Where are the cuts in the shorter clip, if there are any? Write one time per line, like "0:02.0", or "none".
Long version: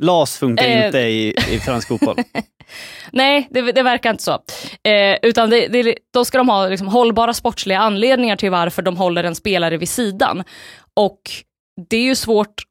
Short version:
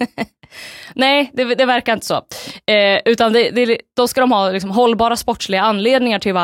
none